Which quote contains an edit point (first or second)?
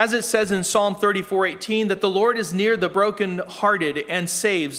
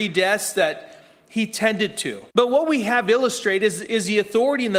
second